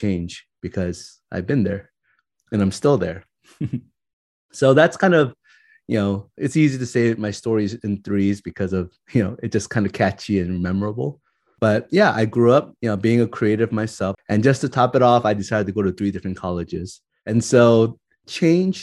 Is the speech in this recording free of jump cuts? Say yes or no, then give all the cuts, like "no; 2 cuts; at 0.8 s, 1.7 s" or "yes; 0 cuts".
no; 1 cut; at 14.1 s